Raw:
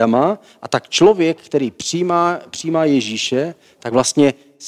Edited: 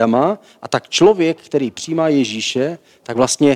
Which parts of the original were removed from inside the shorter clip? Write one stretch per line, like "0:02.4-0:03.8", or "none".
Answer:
0:01.7-0:02.5